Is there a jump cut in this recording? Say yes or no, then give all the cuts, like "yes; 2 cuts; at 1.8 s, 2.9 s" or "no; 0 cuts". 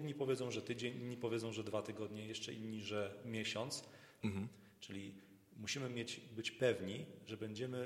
yes; 1 cut; at 4.2 s